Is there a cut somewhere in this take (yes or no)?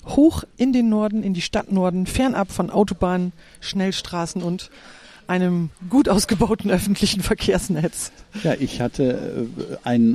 no